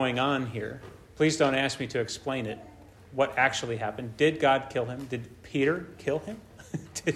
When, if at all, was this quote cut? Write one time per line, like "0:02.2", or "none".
none